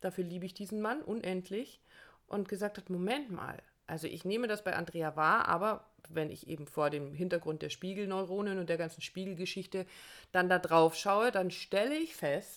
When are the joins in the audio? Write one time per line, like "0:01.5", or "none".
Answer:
none